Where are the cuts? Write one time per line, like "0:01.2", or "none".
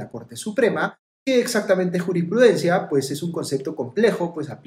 0:01.1